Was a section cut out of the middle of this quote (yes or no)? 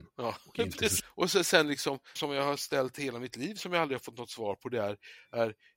yes